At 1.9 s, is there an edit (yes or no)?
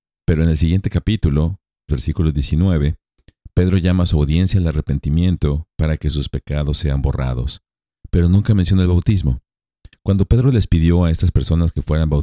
yes